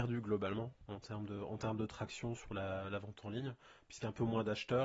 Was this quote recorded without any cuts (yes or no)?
yes